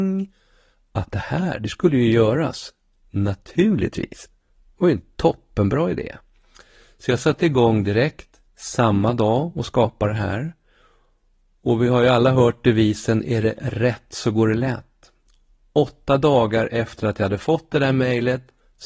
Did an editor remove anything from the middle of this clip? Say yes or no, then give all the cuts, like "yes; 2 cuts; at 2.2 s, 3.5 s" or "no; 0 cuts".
no; 0 cuts